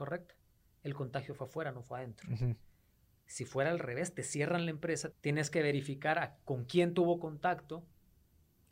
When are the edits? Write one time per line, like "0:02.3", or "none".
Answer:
0:05.1